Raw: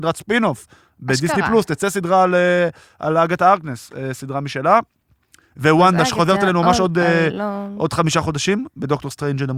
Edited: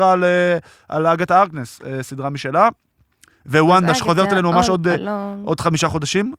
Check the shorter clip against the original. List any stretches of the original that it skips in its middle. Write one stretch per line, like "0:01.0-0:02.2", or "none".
0:07.0-0:07.3